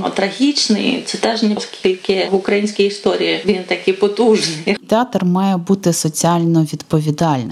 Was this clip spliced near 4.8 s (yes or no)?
yes